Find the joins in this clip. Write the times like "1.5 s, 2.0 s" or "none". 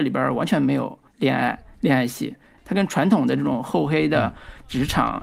1.1 s, 2.6 s